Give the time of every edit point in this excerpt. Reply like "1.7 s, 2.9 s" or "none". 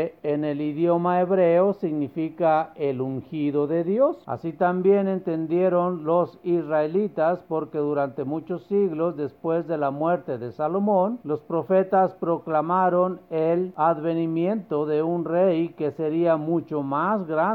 4.2 s

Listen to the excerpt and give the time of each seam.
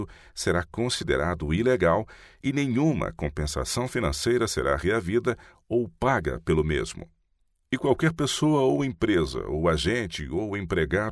7.6 s

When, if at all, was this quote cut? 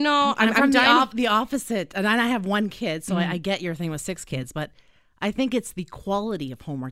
none

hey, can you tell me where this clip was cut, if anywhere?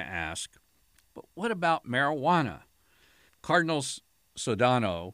1.1 s, 3.3 s

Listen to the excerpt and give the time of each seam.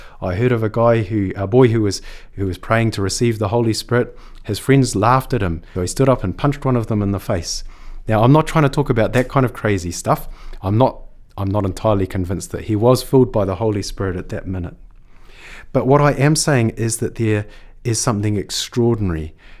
5.7 s

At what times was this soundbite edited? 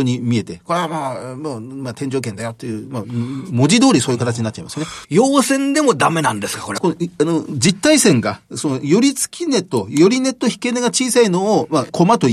5.0 s, 6.8 s

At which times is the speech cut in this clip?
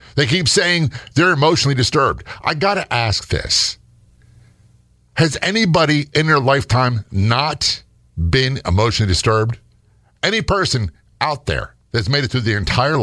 none

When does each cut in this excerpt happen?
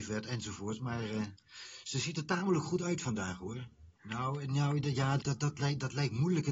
4.0 s, 5.2 s

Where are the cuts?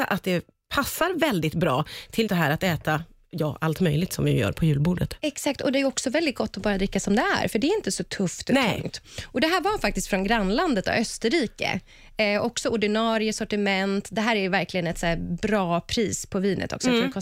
2.3 s

